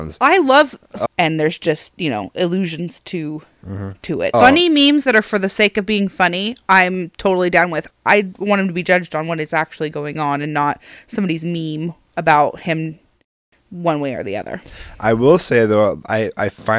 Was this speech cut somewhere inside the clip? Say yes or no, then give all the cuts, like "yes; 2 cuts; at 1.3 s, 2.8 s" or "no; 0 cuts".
yes; 3 cuts; at 1.1 s, 4.3 s, 7.9 s